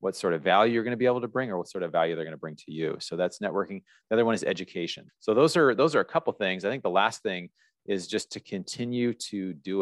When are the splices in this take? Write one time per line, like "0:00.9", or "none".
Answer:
0:05.1